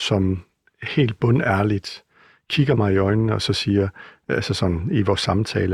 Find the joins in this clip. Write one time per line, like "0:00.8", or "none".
none